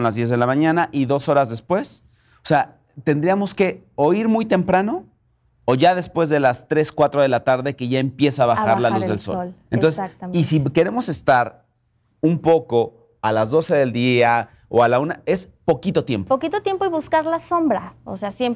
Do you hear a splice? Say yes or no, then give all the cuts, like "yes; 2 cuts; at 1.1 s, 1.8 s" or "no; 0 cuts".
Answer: no; 0 cuts